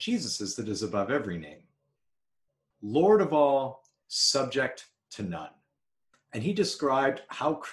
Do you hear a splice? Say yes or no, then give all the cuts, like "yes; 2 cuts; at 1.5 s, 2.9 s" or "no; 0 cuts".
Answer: yes; 2 cuts; at 2.7 s, 6.1 s